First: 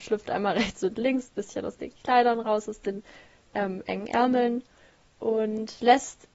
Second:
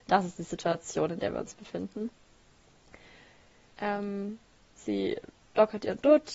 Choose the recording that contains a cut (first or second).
second